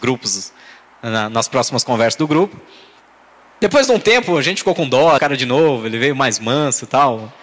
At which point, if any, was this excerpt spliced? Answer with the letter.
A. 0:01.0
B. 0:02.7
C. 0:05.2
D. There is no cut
C